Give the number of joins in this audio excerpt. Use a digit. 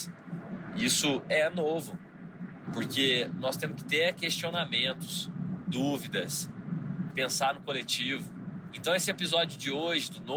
3